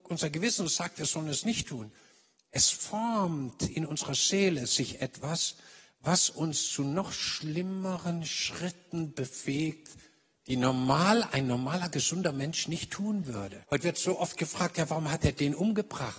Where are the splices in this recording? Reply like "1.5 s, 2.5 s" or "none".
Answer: 13.6 s